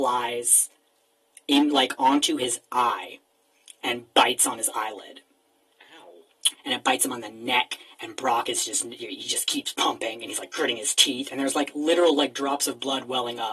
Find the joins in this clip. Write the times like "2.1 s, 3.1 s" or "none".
6.5 s